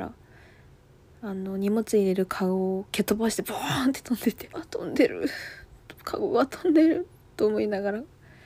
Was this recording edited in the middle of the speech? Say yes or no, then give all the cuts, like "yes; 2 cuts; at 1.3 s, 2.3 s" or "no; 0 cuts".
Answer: yes; 1 cut; at 4.5 s